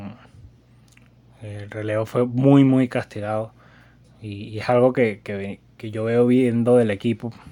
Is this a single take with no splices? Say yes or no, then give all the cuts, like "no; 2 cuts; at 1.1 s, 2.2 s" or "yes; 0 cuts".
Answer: yes; 0 cuts